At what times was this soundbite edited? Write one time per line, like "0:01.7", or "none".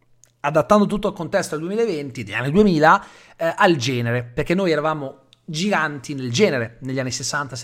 none

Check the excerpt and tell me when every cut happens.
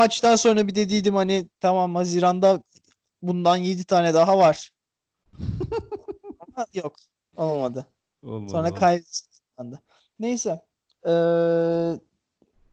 none

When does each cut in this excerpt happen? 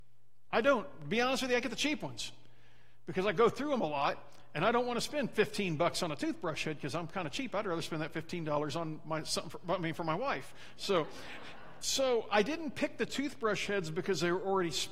0:11.8

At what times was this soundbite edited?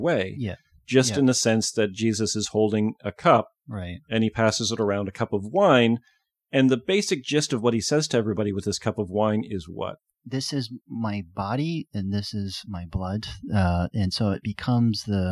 none

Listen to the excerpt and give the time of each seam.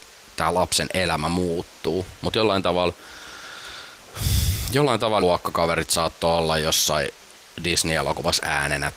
0:05.2

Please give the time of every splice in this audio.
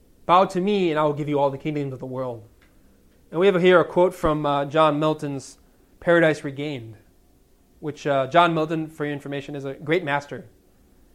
none

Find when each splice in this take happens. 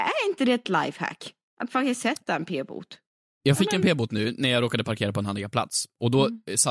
none

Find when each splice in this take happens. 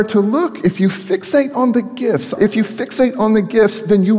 0:02.3

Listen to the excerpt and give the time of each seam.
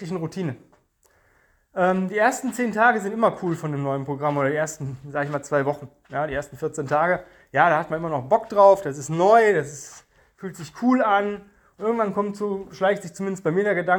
none

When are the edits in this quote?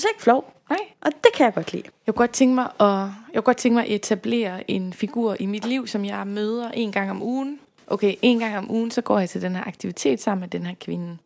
0:01.9

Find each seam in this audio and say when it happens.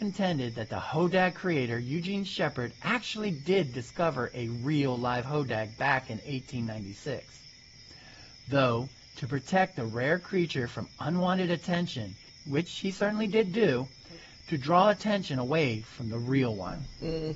0:12.3

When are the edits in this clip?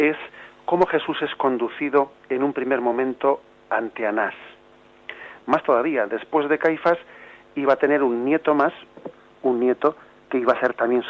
0:05.4

